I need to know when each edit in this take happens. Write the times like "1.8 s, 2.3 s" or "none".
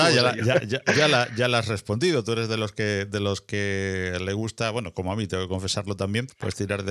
none